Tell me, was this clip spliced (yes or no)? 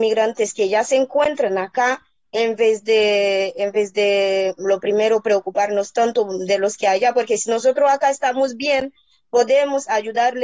no